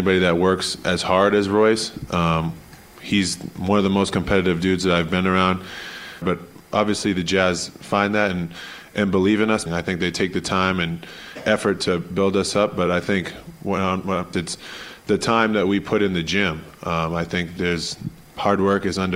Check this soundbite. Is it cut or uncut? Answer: cut